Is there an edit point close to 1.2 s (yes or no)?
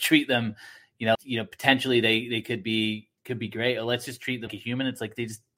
yes